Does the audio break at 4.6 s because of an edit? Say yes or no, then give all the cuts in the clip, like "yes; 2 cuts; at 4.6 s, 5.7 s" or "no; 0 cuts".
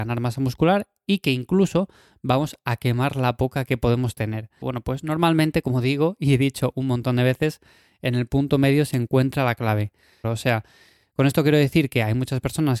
yes; 2 cuts; at 4.6 s, 10.2 s